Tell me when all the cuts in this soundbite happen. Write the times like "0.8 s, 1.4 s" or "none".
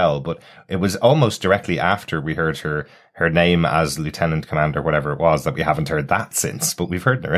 none